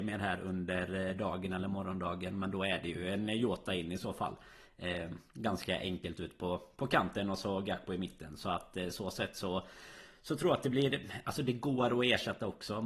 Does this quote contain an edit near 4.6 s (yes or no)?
no